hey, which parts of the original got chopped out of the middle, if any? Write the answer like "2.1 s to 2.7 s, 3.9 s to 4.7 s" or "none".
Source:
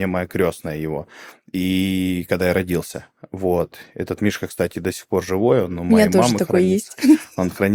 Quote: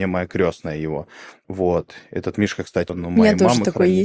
1.4 s to 3.3 s, 4.7 s to 5.6 s